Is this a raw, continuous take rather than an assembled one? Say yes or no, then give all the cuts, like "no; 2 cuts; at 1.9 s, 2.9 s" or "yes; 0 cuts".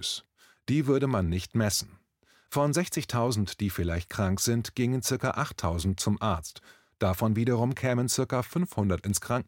yes; 0 cuts